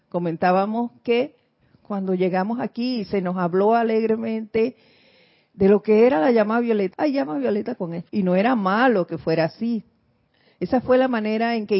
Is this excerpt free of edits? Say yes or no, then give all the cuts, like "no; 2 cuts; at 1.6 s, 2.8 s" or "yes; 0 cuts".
no; 2 cuts; at 6.9 s, 8.1 s